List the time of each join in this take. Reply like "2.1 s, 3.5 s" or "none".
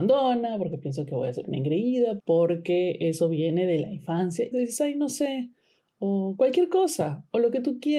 2.2 s, 4.5 s